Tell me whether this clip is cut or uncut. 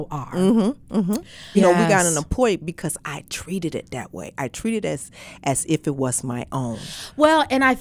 cut